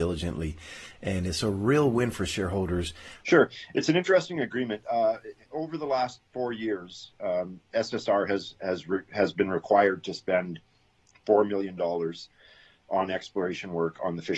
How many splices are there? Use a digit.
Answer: 1